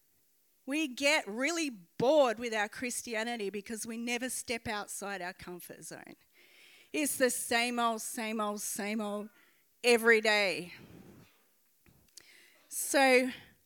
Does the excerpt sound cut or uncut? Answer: uncut